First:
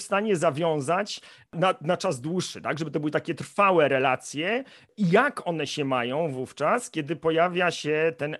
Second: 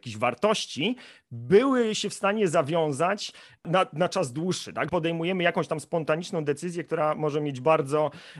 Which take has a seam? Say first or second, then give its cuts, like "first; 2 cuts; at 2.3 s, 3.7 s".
second; 1 cut; at 4.9 s